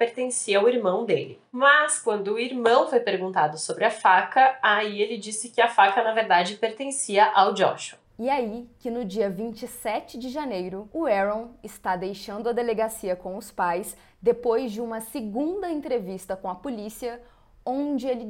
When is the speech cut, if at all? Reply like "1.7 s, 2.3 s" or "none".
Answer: none